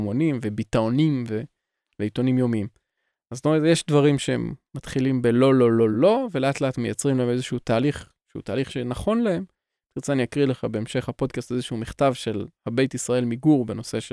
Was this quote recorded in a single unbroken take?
no; 1 cut; at 5.9 s

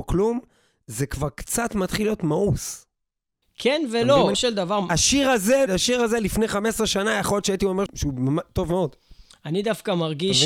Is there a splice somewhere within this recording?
yes; 3 cuts; at 4.3 s, 5.7 s, 7.9 s

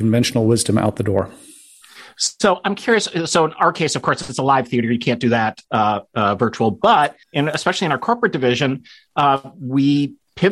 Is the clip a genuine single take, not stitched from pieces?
no; 1 cut; at 7.2 s

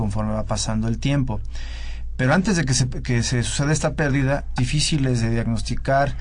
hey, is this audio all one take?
no; 1 cut; at 4.6 s

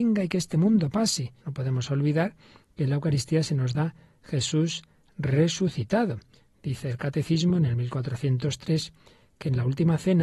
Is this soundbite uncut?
no; 1 cut; at 1.4 s

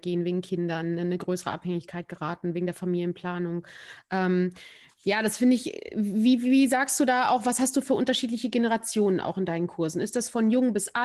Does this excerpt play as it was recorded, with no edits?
yes; 0 cuts

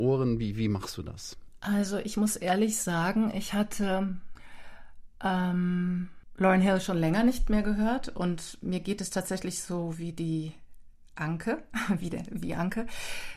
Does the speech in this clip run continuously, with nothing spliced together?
yes; 0 cuts

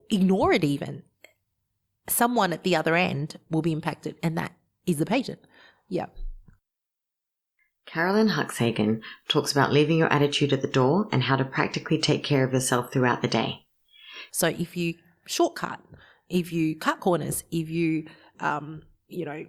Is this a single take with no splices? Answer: no; 1 cut; at 14.3 s

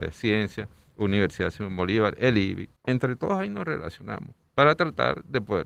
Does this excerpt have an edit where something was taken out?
yes; 1 cut; at 2.8 s

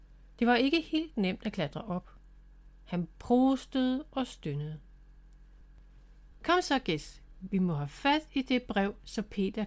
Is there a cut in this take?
yes; 1 cut; at 6.3 s

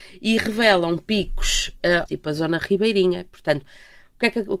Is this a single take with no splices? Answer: no; 1 cut; at 2.1 s

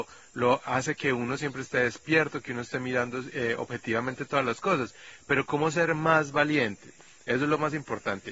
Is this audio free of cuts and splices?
yes; 0 cuts

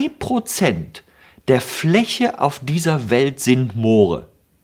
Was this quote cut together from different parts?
no; 0 cuts

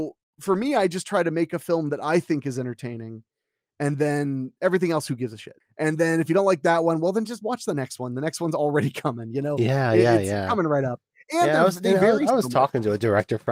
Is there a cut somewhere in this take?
yes; 1 cut; at 5.6 s

